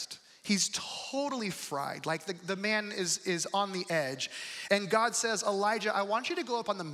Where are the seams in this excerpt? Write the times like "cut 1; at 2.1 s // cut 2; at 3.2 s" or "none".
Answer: cut 1; at 4.7 s

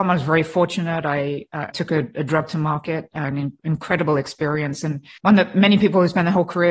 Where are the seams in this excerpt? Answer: cut 1; at 1.7 s // cut 2; at 5.2 s

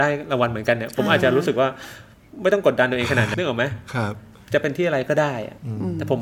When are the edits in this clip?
cut 1; at 3.3 s

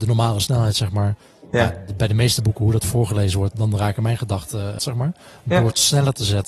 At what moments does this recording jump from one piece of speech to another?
cut 1; at 3.5 s // cut 2; at 4.8 s

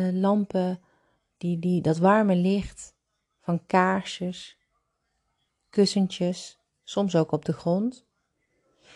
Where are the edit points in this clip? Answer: cut 1; at 5.5 s

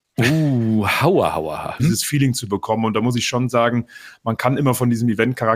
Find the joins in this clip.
cut 1; at 1.8 s

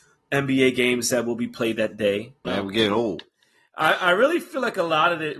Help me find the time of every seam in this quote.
cut 1; at 2.4 s

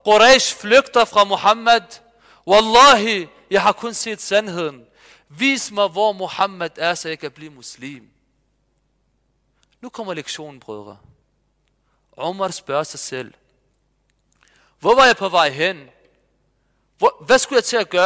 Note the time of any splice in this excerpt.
none

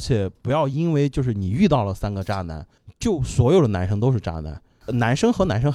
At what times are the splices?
none

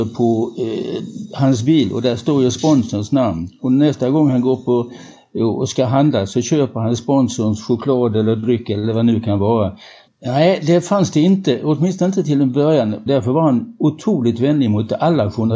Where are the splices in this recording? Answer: cut 1; at 10.1 s // cut 2; at 13.1 s

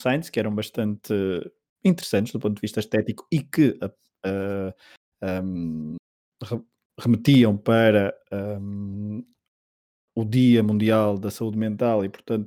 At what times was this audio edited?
none

